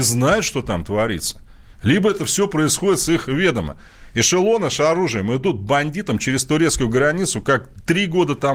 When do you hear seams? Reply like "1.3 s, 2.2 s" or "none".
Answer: none